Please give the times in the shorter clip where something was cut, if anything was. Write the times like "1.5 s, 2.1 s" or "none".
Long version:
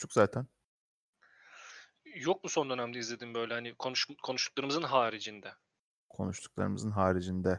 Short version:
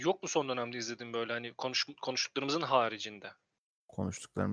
none